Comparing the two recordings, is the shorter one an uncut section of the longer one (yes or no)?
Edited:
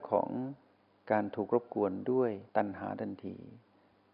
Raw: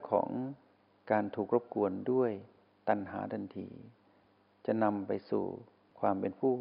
no